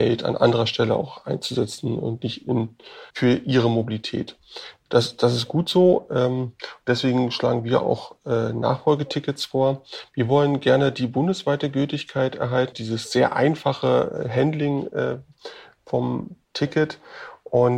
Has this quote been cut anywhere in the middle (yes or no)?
yes